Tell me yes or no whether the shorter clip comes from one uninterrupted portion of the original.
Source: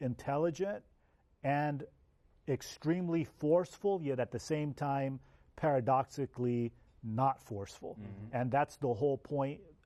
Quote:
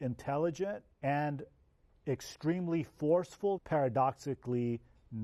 no